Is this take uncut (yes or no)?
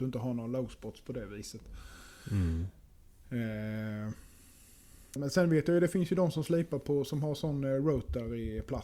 no